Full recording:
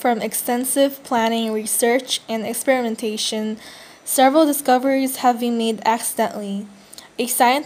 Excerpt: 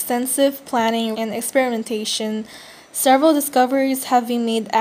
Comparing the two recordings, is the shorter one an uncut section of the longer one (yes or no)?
no